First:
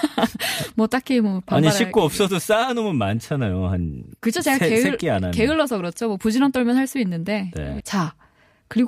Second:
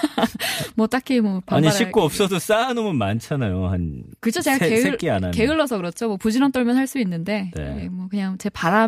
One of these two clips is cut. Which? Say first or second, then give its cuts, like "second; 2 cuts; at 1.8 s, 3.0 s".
first; 1 cut; at 7.8 s